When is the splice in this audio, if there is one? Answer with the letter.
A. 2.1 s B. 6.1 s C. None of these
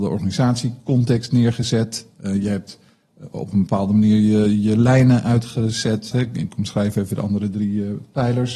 B